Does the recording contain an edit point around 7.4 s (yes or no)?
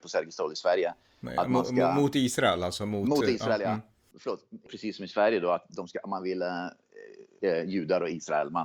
yes